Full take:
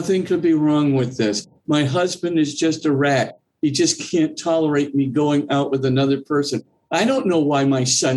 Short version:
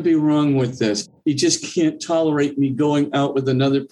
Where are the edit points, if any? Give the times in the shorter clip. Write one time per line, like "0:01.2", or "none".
0:01.2